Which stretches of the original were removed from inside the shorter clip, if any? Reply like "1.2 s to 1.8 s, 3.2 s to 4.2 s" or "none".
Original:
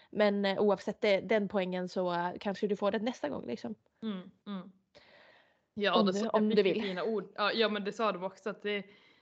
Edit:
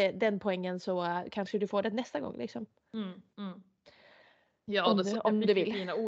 none